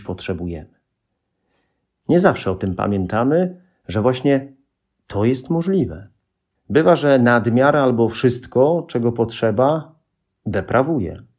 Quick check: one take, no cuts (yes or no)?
no